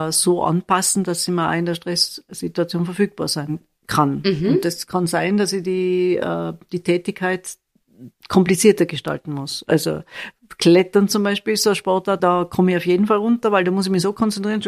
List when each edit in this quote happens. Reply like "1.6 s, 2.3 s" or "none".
8.2 s, 12.2 s